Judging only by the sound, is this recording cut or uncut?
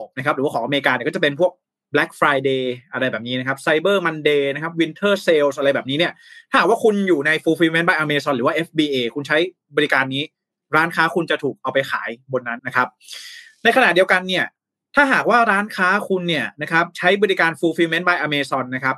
cut